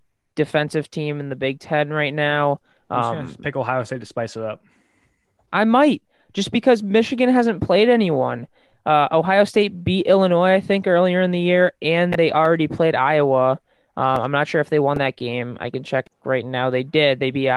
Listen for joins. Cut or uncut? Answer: uncut